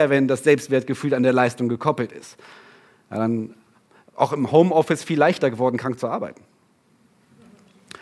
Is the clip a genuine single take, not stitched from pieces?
yes; 0 cuts

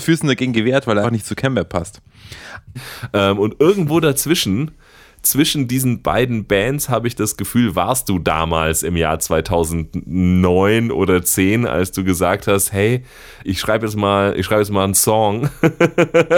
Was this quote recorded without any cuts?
no; 3 cuts; at 1.0 s, 2.8 s, 13.4 s

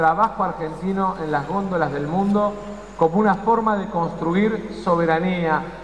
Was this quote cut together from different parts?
no; 0 cuts

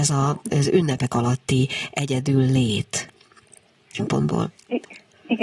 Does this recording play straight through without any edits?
no; 1 cut; at 4.0 s

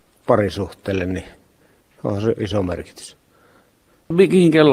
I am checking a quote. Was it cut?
no; 0 cuts

